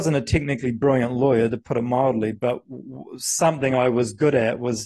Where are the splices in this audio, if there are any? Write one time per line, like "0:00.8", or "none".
none